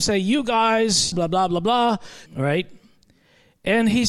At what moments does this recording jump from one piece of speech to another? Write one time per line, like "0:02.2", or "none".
0:01.1
0:02.3